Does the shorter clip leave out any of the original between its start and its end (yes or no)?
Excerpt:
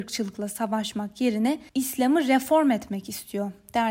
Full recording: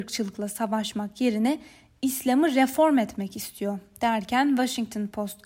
yes